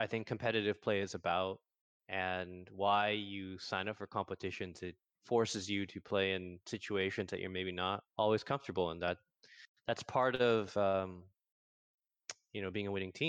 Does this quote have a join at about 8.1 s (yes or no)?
yes